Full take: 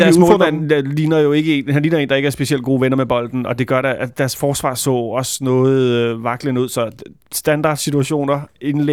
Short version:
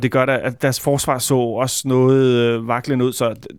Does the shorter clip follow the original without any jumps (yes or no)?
yes